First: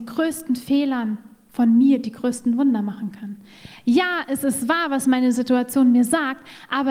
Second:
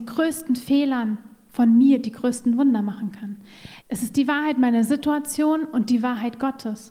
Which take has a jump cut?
second; 1 cut; at 3.8 s

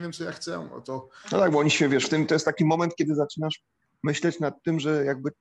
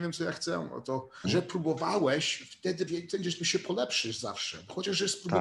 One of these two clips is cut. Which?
second; 2 cuts; at 1.2 s, 2.9 s

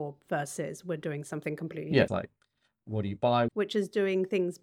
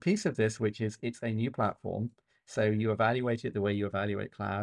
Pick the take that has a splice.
first; 2 cuts; at 2.1 s, 3.5 s

